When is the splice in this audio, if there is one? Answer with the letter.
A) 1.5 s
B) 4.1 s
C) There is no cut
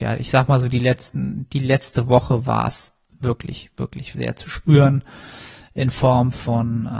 B